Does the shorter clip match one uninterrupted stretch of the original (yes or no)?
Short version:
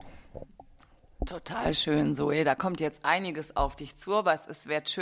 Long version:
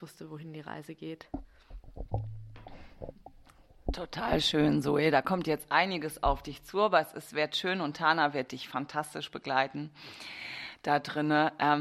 yes